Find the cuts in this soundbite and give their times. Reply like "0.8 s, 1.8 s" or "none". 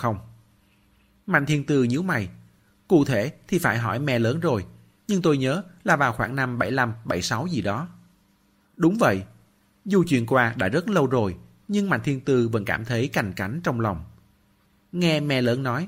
8.6 s